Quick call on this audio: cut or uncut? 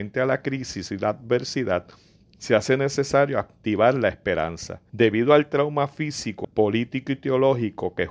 cut